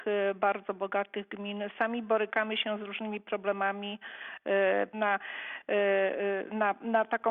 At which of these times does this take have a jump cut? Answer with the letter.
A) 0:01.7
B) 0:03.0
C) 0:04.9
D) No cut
C